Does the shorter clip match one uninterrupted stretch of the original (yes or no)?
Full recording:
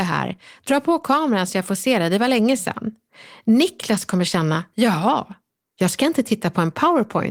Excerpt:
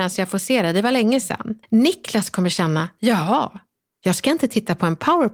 no